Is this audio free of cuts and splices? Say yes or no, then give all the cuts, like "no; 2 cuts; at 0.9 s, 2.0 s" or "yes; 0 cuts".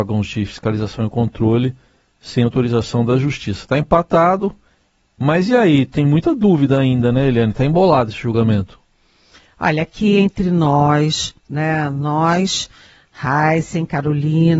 yes; 0 cuts